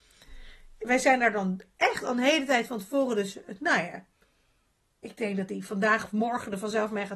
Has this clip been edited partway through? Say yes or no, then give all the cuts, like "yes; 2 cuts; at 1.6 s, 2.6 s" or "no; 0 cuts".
no; 0 cuts